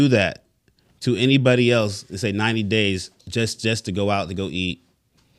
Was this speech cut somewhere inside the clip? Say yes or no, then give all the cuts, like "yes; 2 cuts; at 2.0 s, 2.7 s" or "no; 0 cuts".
yes; 1 cut; at 3.2 s